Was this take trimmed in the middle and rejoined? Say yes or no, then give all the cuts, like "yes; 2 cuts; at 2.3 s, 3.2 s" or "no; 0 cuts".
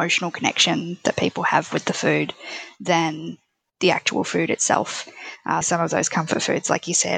yes; 1 cut; at 5.6 s